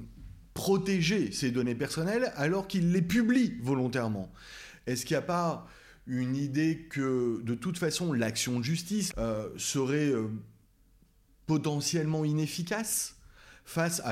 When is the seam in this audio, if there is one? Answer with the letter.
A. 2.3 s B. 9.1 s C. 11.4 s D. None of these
B